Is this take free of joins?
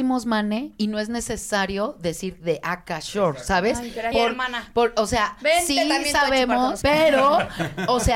no; 2 cuts; at 4.1 s, 6.8 s

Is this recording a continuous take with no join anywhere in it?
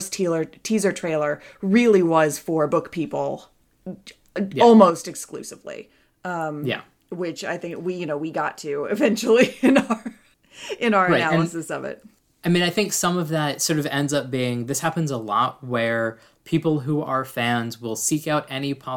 yes; 0 cuts

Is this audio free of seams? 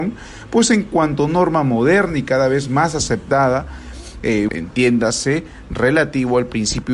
no; 1 cut; at 4.5 s

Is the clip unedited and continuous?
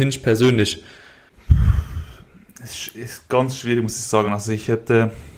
yes; 0 cuts

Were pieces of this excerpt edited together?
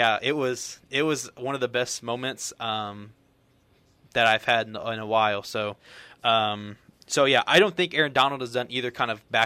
no; 0 cuts

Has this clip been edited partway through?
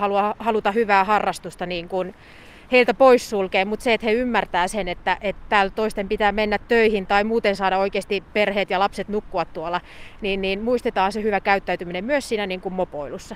no; 0 cuts

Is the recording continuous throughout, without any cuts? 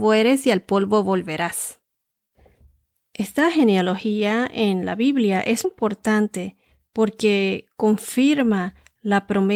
no; 1 cut; at 5.6 s

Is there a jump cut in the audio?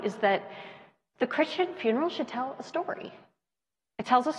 no; 0 cuts

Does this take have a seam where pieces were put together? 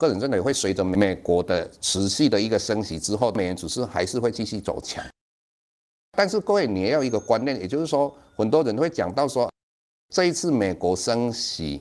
no; 0 cuts

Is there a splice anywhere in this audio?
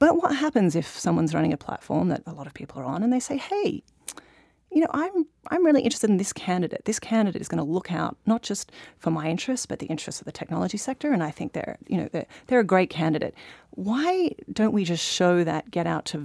no; 0 cuts

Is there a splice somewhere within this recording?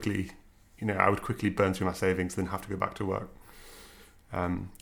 no; 0 cuts

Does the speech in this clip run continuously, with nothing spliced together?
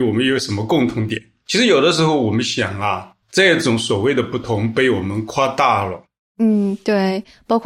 no; 1 cut; at 3.2 s

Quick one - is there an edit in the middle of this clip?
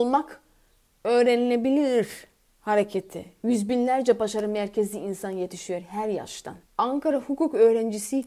yes; 1 cut; at 6.7 s

